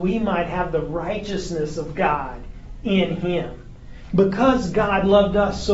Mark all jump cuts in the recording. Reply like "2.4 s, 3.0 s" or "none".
4.1 s